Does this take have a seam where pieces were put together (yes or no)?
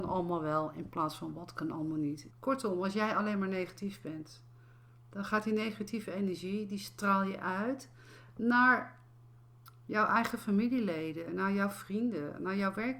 yes